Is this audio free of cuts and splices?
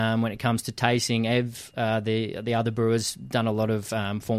yes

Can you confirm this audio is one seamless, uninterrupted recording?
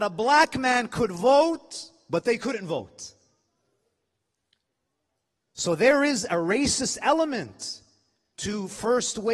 yes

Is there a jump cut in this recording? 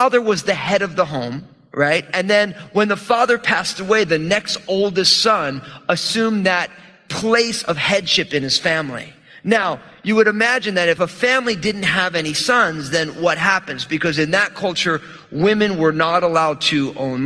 no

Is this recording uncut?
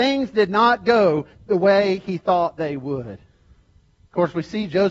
yes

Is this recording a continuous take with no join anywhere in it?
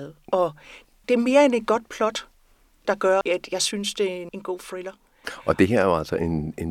no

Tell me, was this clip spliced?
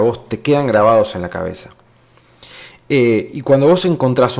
no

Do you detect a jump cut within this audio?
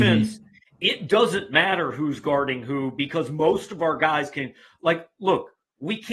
no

